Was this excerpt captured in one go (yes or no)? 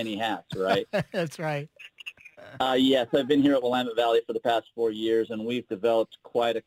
yes